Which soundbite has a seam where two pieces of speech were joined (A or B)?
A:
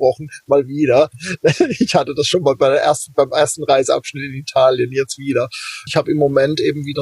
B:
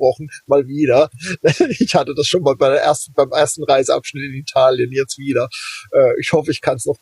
A